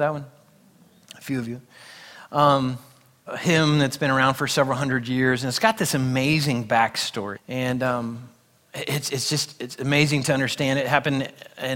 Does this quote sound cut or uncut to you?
cut